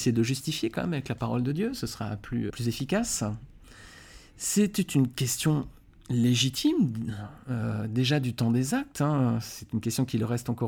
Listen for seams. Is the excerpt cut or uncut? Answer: cut